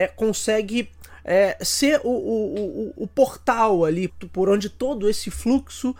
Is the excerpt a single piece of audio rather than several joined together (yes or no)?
no